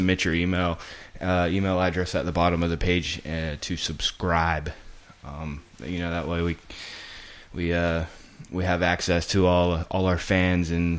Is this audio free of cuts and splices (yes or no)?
yes